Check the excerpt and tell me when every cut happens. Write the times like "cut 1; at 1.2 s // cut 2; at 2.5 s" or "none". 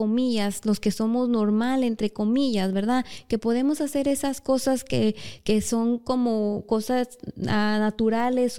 none